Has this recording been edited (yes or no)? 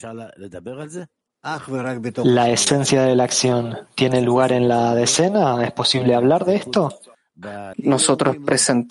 yes